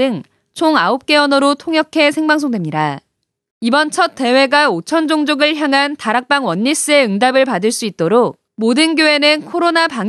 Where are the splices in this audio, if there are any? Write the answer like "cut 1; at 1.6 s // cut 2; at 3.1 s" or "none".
cut 1; at 3.5 s // cut 2; at 8.5 s